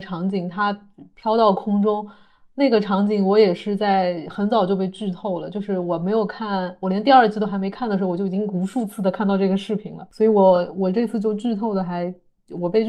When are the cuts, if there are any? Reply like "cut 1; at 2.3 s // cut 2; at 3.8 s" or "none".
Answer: none